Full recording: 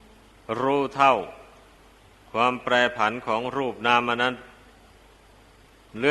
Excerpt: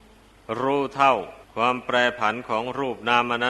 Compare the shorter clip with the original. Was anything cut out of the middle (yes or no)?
yes